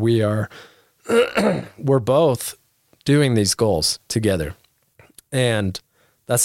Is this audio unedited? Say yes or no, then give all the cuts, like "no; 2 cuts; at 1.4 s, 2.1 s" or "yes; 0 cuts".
yes; 0 cuts